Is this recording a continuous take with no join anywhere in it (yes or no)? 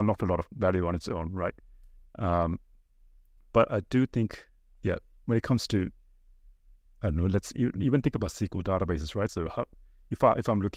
no